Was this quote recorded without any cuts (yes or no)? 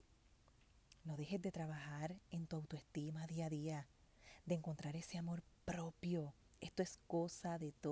yes